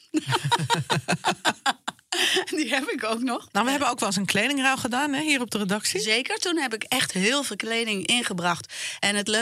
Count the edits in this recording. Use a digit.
1